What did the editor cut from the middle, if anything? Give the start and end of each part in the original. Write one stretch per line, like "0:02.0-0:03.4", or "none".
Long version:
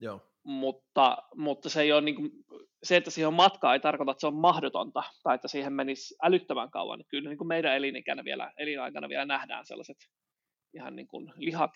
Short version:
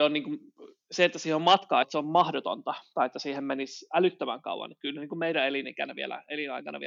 0:03.7-0:04.1

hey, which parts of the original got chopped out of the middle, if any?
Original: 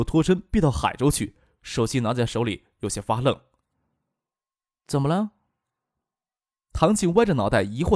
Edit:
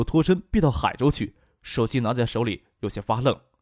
none

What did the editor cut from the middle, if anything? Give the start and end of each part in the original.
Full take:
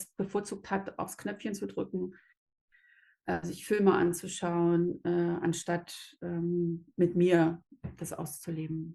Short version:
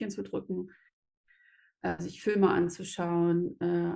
none

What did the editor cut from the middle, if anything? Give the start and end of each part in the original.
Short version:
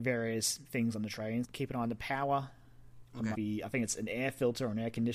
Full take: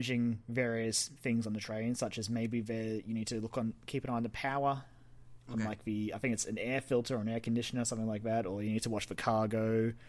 0:01.9-0:03.8
0:05.7-0:05.8

